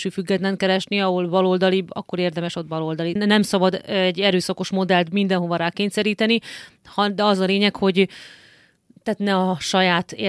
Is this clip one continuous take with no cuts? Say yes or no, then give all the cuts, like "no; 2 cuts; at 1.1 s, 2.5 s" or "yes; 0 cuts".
no; 1 cut; at 3.2 s